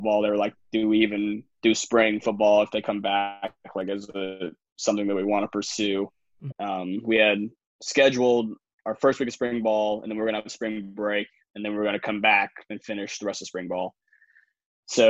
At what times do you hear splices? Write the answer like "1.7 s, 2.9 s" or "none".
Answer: 6.5 s